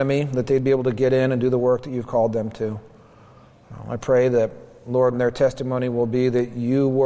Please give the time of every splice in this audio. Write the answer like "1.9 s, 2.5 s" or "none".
5.1 s